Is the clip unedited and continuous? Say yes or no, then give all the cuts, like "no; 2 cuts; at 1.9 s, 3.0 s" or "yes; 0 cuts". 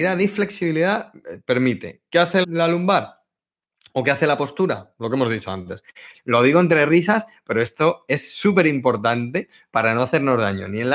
no; 2 cuts; at 2.4 s, 6.1 s